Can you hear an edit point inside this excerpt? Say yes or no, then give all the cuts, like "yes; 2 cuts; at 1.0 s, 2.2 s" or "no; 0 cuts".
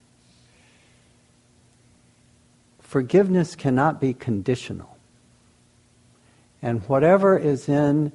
no; 0 cuts